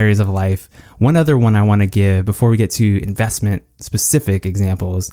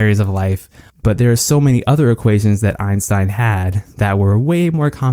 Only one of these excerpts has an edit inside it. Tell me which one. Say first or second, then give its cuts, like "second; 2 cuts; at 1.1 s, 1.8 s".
second; 1 cut; at 0.9 s